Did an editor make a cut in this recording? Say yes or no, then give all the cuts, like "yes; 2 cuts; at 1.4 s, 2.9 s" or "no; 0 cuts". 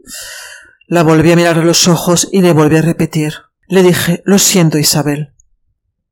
no; 0 cuts